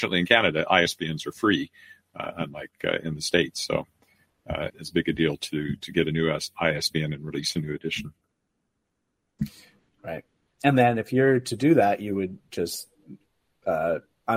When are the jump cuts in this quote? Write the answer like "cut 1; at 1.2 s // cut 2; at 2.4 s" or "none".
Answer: cut 1; at 4.7 s